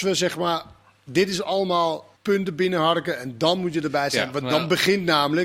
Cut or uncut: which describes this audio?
cut